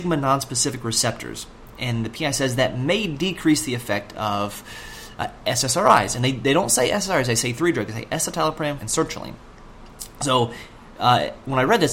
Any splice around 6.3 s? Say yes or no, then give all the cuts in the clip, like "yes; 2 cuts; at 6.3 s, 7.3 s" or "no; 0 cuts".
no; 1 cut; at 8.8 s